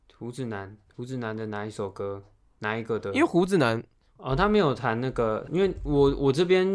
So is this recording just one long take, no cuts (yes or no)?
no